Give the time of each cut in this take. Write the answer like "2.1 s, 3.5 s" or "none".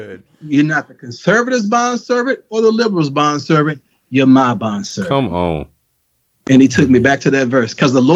none